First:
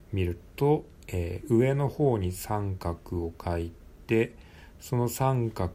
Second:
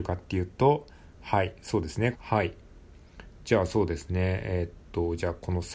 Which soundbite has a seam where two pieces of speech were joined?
second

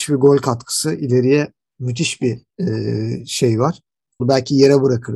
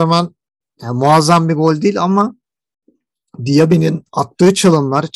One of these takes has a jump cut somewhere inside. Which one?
first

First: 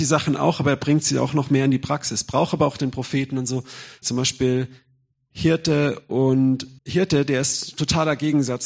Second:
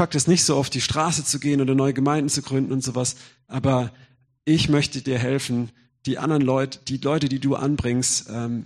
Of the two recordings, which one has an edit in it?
first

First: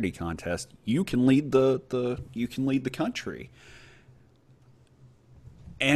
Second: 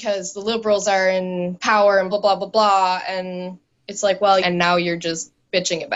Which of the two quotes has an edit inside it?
second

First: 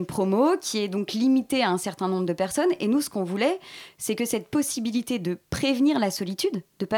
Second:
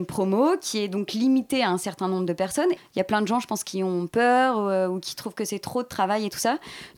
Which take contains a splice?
second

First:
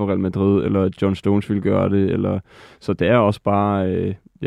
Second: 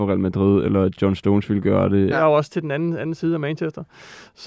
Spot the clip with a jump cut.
second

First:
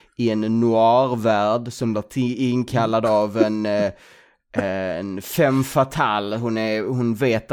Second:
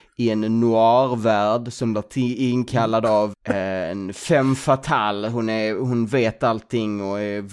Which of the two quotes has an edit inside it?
second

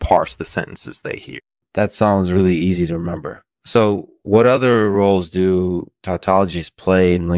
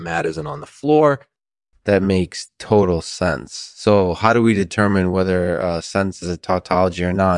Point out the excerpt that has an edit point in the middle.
first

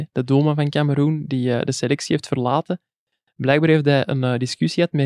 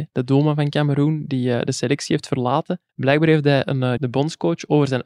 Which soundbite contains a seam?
second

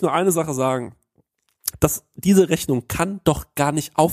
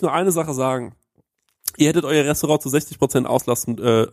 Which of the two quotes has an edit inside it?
first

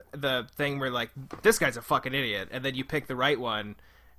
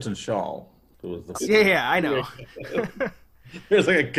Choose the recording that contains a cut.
second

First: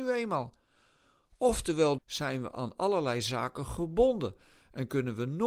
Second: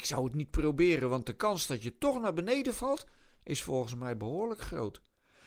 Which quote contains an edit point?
first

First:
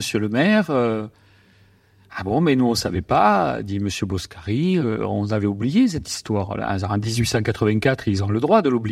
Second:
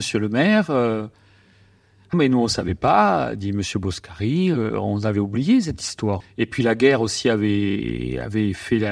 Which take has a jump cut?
second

